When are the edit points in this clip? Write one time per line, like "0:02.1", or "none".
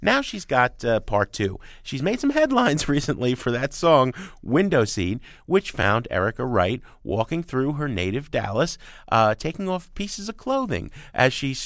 none